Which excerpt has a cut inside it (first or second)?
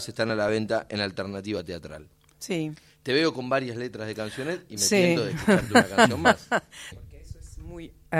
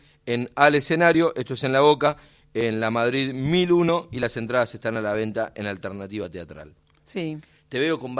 first